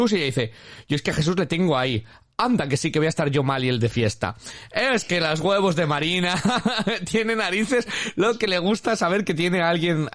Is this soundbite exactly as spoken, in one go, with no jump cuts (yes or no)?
yes